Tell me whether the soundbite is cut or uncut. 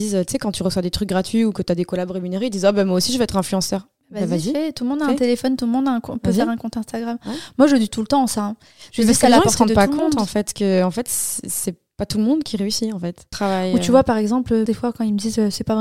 cut